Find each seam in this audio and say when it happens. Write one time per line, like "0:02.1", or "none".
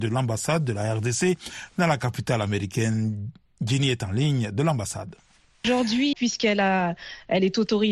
0:06.1